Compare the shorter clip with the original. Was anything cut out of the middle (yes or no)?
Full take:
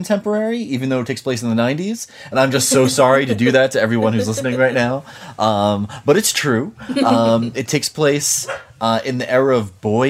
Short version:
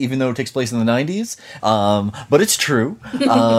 yes